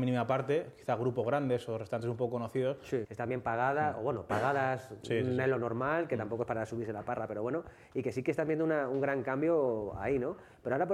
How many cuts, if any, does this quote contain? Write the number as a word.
one